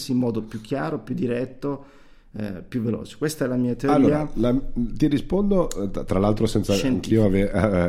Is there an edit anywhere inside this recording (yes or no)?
no